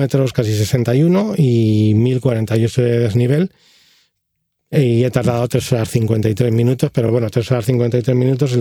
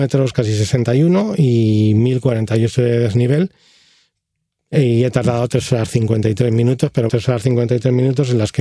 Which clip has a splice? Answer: second; 1 cut; at 7.1 s

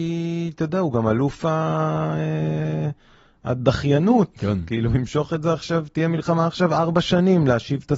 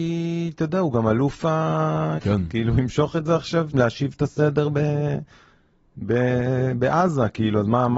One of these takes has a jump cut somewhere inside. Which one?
second; 2 cuts; at 2.2 s, 3.7 s

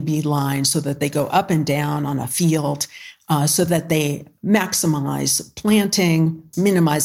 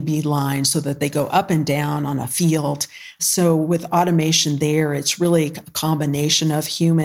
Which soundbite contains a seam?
second; 1 cut; at 3.2 s

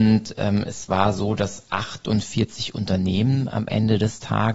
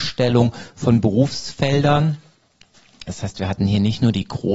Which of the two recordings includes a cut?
second; 1 cut; at 3.1 s

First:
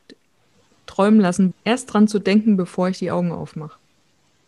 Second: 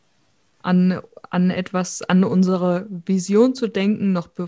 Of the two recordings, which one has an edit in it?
first; 1 cut; at 1.5 s

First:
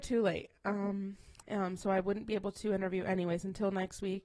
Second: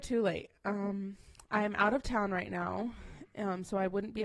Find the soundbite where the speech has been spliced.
first; 1 cut; at 1.4 s

